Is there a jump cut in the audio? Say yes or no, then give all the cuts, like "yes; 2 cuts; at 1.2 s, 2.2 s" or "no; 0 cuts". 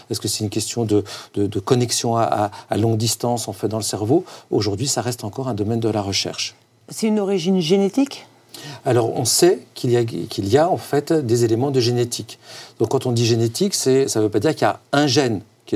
no; 0 cuts